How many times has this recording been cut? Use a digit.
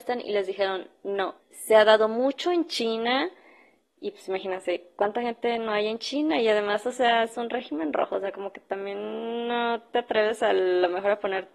1